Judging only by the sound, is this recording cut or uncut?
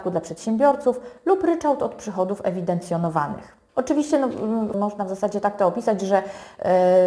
cut